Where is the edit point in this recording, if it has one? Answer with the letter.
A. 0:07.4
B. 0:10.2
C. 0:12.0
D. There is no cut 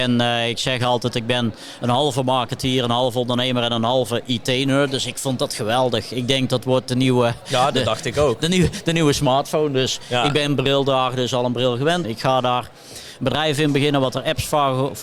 C